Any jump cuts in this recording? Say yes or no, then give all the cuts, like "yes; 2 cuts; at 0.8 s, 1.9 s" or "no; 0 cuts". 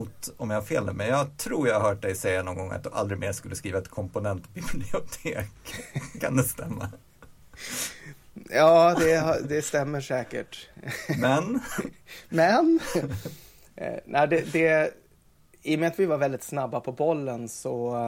no; 0 cuts